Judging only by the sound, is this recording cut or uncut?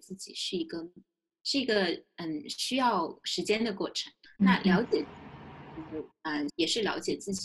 cut